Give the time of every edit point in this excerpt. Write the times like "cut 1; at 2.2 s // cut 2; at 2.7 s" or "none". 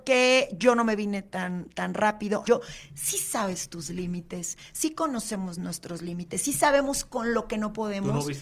cut 1; at 2.4 s